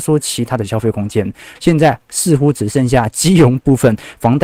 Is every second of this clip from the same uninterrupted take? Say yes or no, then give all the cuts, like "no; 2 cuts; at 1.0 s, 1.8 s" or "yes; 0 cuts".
no; 1 cut; at 1.6 s